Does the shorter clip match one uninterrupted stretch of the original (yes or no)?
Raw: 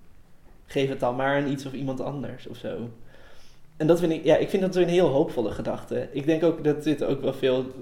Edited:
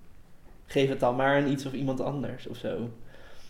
yes